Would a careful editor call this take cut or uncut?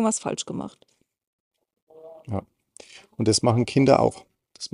uncut